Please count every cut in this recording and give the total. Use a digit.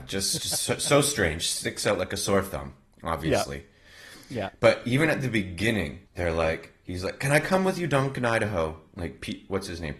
1